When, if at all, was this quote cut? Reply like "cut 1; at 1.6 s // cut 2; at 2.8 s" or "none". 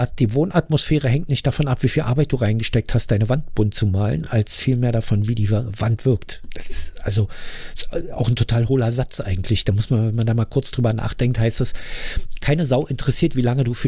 none